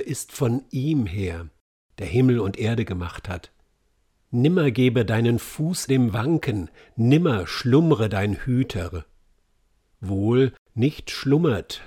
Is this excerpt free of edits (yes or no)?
no